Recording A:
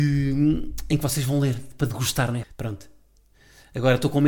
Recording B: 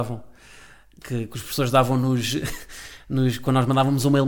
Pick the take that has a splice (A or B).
A